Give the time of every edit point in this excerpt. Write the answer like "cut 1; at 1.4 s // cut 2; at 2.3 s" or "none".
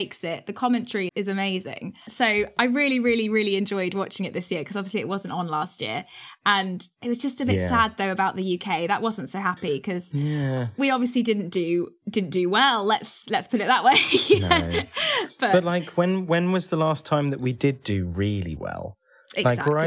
cut 1; at 1.1 s